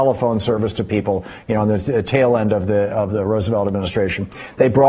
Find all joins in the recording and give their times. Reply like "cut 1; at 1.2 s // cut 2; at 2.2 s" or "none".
none